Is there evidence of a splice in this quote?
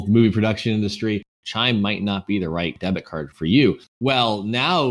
yes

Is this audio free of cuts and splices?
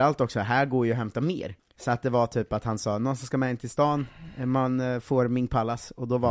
no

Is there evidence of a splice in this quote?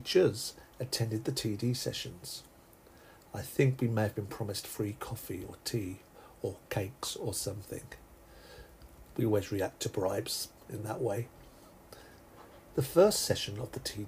yes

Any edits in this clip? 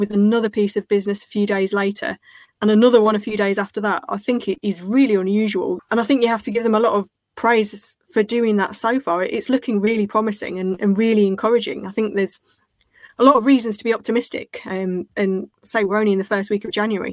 yes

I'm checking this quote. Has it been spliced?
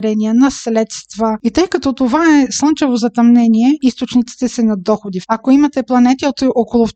yes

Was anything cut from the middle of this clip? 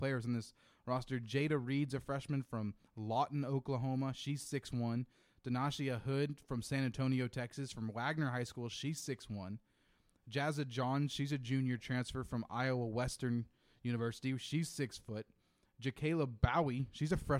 no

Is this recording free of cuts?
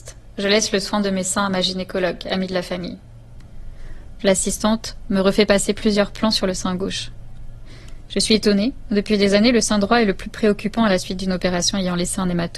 no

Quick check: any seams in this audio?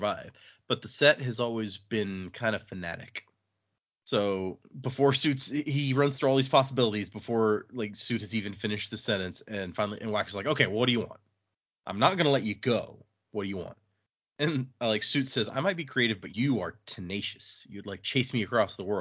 yes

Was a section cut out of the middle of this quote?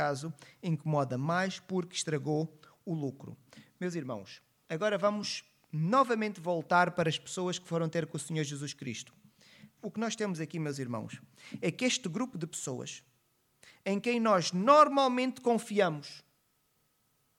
yes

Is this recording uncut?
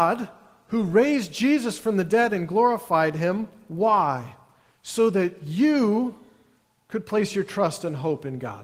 yes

